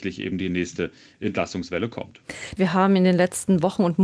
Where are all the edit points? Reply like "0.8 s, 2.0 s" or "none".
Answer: 2.6 s